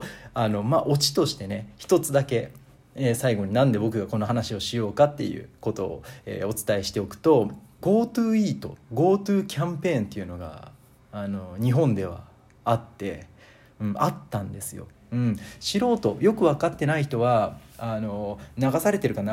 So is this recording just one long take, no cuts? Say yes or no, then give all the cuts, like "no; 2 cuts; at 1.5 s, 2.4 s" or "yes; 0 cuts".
no; 2 cuts; at 7.8 s, 14.9 s